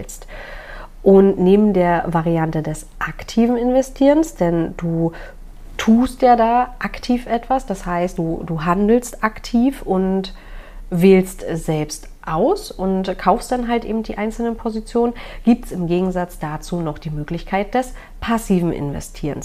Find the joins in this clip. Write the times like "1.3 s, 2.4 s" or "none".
none